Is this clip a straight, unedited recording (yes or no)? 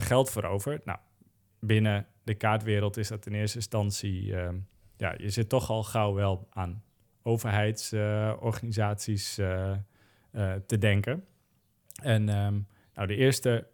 yes